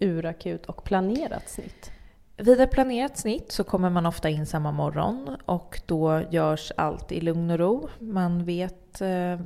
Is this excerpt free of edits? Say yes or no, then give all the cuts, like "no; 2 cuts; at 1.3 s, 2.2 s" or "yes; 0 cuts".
yes; 0 cuts